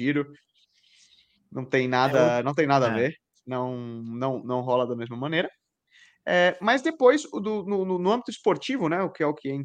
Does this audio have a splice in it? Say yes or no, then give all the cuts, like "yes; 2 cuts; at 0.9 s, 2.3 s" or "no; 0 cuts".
no; 0 cuts